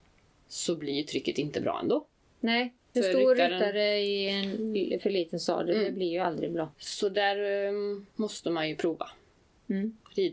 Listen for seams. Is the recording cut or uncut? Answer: cut